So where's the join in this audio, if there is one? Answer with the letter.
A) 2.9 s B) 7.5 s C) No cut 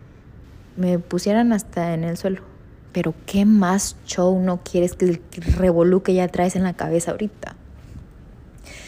A